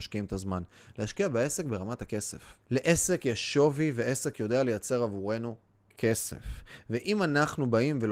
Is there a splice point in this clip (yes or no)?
yes